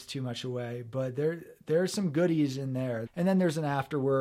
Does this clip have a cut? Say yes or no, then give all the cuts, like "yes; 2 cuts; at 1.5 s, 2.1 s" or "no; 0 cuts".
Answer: yes; 1 cut; at 3.1 s